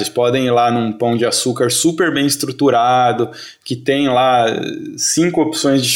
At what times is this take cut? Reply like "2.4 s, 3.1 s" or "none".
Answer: none

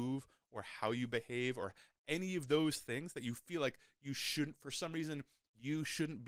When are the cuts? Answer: none

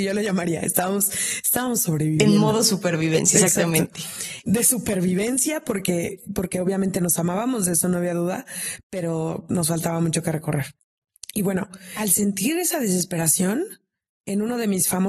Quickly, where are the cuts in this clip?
4.5 s

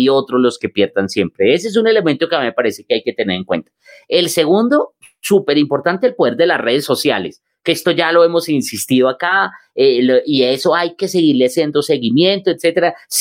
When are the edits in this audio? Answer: none

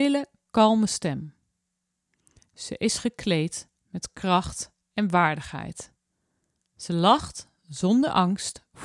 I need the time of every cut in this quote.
none

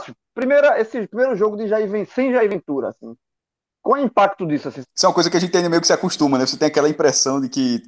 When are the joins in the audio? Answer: 4.8 s

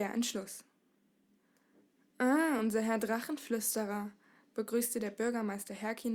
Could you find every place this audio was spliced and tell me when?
none

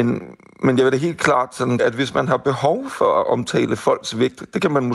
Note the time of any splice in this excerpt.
1.8 s

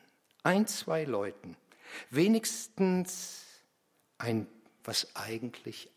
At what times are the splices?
4.8 s

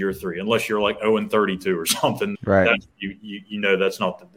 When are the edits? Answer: 2.3 s

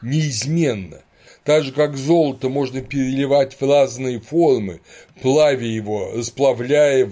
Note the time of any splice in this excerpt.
1.3 s

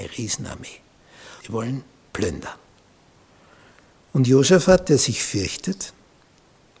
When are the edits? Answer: 1.4 s, 4.0 s

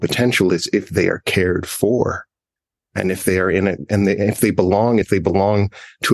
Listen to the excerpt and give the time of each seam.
5.0 s

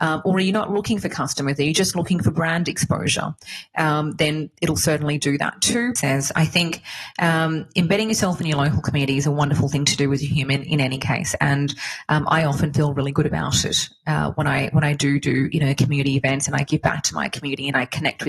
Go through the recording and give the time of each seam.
6.0 s

